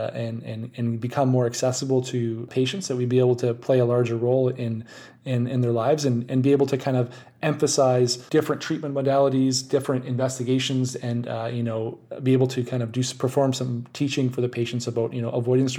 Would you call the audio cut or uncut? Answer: uncut